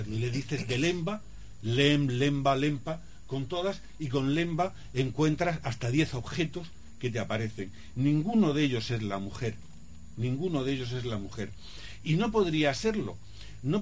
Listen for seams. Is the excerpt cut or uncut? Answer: uncut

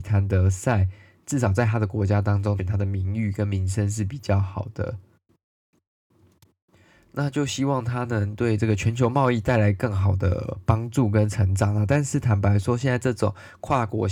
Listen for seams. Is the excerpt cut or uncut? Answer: cut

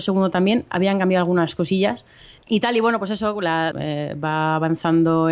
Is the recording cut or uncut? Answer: cut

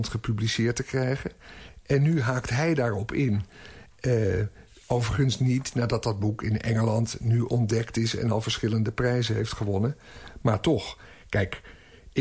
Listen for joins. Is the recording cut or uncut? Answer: uncut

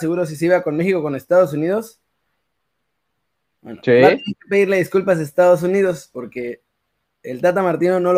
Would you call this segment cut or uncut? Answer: uncut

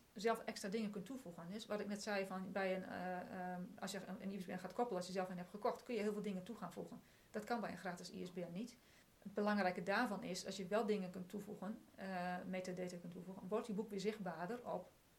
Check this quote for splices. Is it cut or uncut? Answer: uncut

